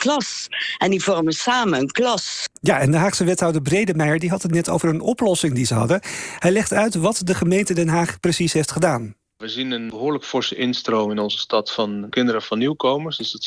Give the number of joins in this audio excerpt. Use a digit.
1